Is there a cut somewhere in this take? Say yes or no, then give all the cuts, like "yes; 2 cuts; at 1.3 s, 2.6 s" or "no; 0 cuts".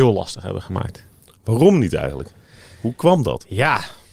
no; 0 cuts